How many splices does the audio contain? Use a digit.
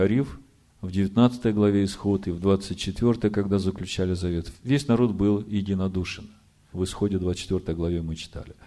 1